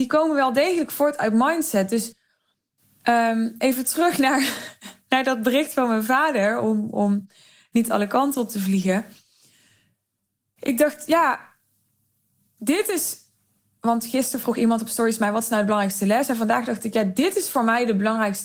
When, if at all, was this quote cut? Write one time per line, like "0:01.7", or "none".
none